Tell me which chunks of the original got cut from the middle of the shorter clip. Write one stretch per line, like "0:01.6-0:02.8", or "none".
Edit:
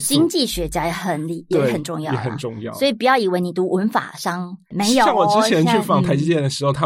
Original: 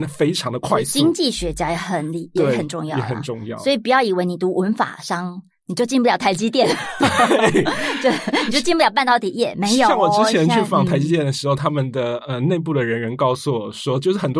0:05.6-0:09.5